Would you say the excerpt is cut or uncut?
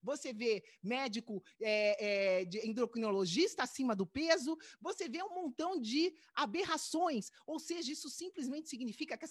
uncut